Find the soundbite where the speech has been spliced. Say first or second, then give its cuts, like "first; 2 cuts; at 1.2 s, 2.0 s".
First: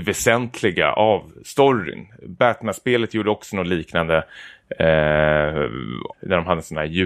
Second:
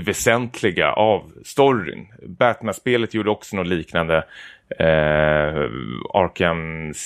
first; 1 cut; at 6.1 s